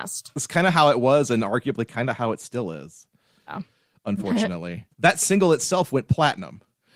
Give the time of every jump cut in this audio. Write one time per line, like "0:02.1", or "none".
0:04.9